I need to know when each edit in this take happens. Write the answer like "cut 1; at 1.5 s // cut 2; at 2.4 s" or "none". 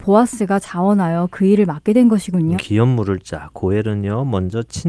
cut 1; at 2.6 s